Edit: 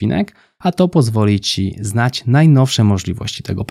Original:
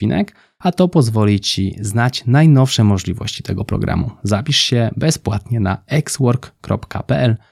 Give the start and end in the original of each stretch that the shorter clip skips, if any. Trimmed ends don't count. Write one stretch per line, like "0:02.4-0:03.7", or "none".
none